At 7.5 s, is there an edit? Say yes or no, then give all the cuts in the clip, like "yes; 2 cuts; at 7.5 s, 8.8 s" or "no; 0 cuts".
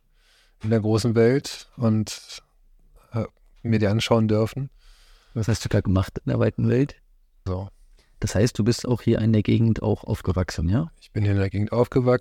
yes; 1 cut; at 7.5 s